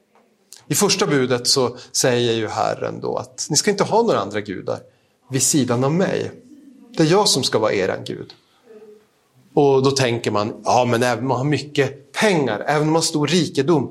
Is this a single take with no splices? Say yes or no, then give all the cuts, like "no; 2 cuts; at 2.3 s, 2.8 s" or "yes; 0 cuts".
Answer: yes; 0 cuts